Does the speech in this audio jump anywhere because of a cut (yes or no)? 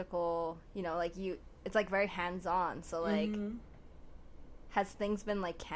no